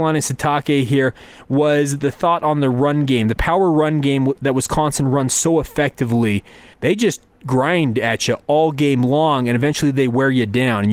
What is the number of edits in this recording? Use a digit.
1